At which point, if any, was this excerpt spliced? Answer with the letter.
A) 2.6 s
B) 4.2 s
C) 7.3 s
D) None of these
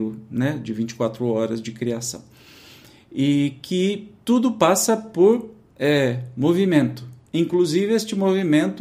B